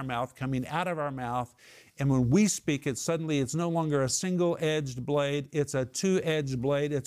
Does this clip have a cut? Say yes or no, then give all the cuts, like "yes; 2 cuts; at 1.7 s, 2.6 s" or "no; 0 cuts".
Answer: no; 0 cuts